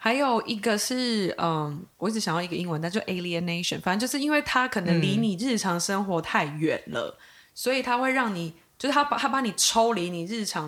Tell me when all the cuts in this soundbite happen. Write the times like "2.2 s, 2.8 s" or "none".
1.9 s